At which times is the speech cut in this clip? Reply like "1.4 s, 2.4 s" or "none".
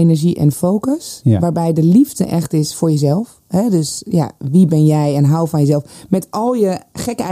none